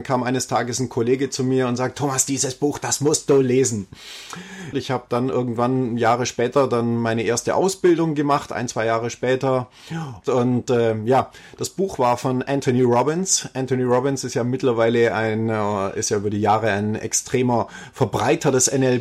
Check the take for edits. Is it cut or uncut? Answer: cut